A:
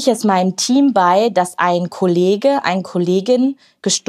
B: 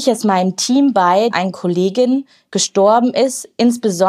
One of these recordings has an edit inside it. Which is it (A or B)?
B